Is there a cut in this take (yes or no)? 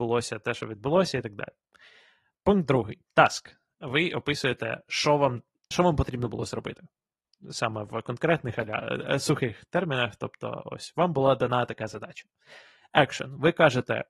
yes